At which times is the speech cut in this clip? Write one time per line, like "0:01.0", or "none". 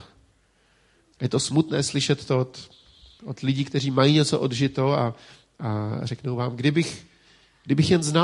0:01.1